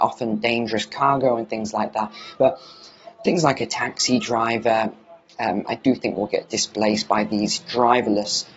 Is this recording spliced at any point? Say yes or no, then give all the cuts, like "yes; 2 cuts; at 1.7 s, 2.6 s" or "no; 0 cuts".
yes; 2 cuts; at 2.3 s, 5.7 s